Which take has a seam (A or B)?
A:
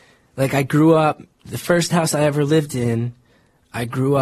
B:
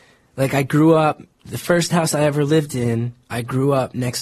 B